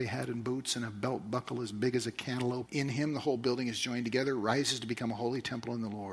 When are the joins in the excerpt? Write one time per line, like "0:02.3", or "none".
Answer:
0:02.7